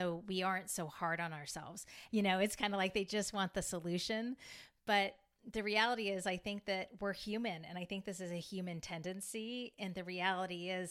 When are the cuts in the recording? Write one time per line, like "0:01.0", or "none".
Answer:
0:02.1